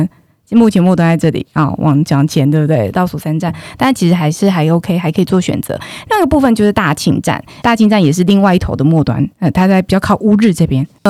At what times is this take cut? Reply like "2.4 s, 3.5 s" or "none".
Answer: 7.6 s, 9.3 s